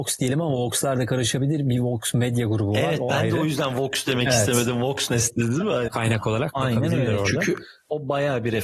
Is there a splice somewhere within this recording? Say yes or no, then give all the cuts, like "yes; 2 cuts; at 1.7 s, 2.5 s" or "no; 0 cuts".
yes; 1 cut; at 5.9 s